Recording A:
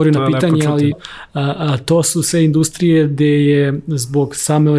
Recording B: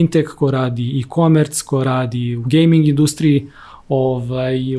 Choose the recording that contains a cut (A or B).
A